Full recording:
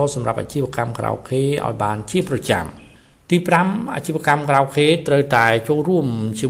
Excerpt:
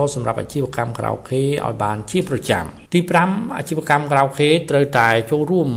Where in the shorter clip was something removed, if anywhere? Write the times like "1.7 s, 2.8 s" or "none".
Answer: 2.9 s